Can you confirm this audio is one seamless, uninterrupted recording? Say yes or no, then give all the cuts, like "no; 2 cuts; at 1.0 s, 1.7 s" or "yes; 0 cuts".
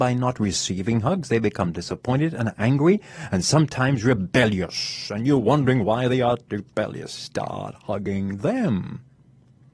yes; 0 cuts